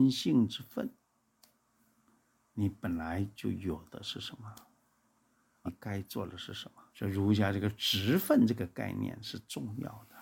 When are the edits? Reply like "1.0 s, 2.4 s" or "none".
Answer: 5.7 s, 6.9 s